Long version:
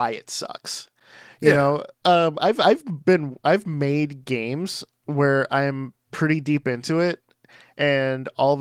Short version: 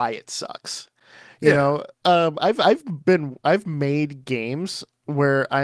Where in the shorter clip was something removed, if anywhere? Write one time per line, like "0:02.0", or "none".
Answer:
none